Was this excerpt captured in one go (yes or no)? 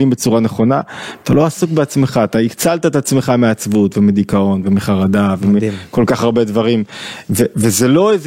yes